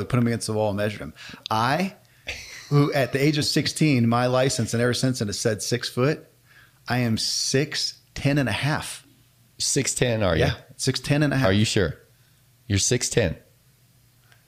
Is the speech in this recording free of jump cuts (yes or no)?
yes